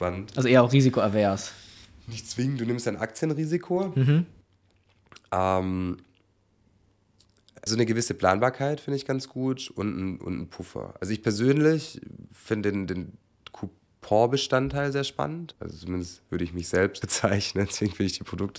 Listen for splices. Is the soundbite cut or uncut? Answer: cut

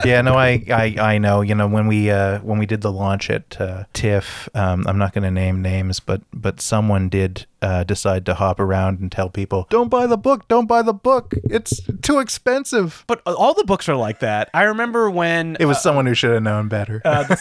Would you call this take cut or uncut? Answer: uncut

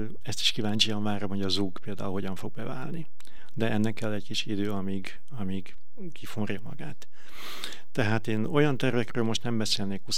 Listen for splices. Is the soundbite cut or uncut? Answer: uncut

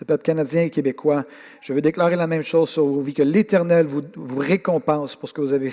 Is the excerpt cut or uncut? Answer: uncut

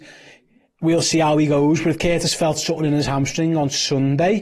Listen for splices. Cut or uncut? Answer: uncut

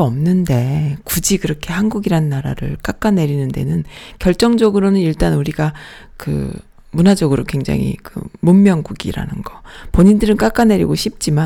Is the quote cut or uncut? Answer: uncut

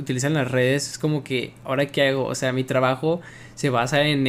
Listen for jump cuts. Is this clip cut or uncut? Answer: uncut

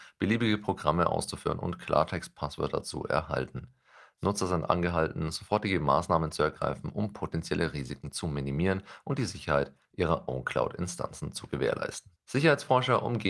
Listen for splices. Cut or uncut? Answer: cut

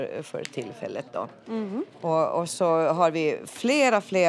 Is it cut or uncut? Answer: uncut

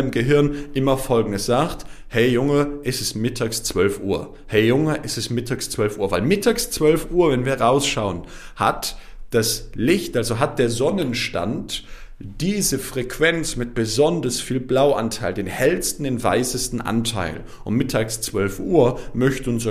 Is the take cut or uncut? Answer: uncut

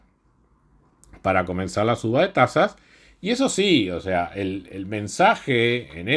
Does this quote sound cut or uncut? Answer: uncut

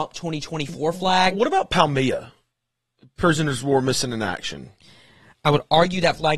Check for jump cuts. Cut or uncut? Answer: uncut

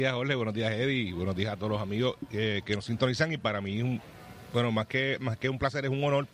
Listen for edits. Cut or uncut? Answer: uncut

